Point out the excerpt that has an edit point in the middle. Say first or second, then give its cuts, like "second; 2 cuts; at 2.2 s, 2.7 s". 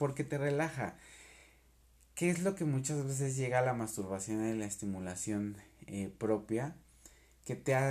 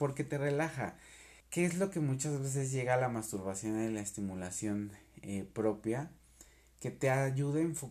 second; 1 cut; at 1.4 s